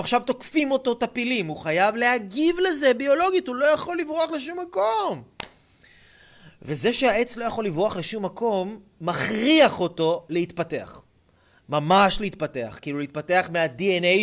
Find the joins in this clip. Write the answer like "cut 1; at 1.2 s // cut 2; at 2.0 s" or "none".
none